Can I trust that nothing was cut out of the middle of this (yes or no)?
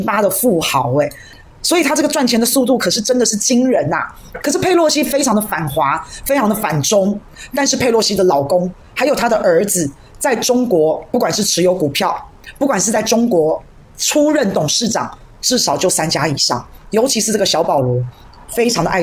yes